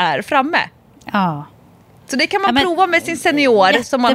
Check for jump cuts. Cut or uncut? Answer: uncut